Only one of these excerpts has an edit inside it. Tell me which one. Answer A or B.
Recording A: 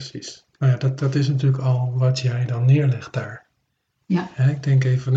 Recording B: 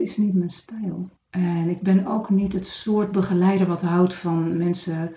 B